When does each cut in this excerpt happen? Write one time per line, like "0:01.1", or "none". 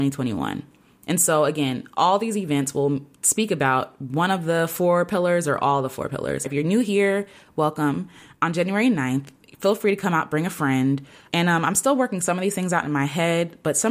0:06.4
0:11.3